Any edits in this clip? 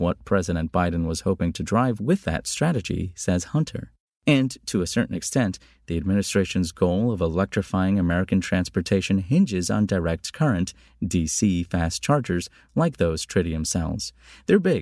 no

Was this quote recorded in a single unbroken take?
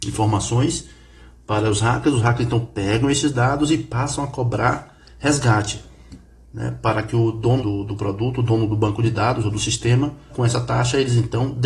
no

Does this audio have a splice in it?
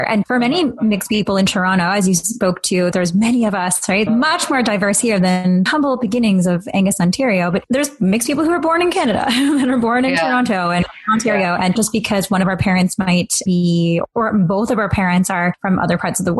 yes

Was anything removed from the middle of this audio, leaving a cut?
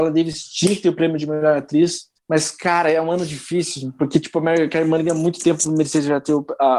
yes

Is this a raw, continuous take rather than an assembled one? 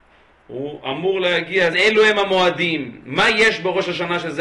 no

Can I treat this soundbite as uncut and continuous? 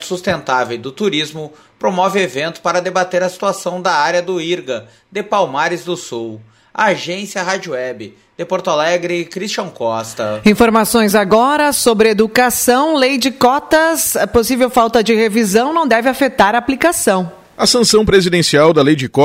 yes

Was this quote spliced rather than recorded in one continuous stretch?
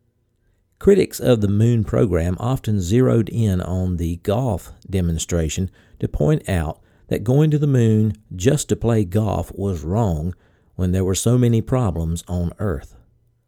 no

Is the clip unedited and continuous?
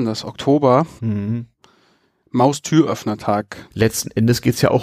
no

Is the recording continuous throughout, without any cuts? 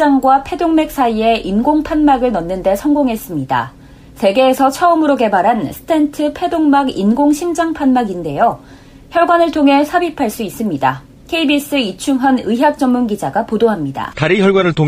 yes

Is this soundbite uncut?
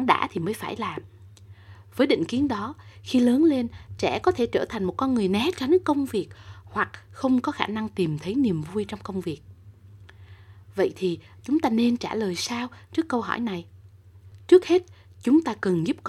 yes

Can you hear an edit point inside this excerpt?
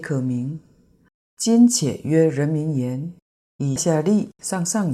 yes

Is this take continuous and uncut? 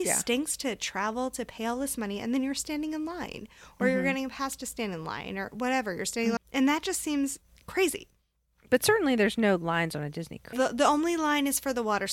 no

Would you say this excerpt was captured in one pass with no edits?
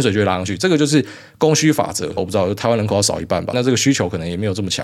no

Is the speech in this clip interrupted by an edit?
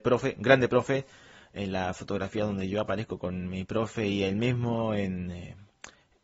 no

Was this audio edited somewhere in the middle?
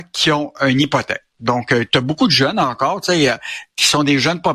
no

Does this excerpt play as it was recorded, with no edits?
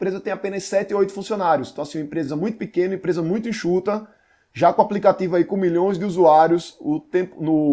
yes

